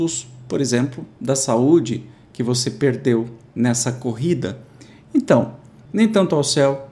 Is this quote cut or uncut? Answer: uncut